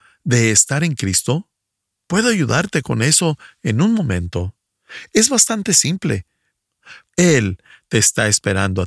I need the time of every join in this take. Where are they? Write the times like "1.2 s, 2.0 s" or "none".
7.1 s